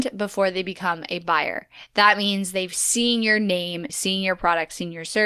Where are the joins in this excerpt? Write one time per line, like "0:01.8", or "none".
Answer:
0:03.9